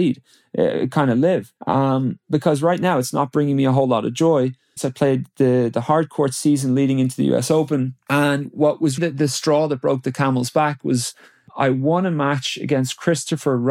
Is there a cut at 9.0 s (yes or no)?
yes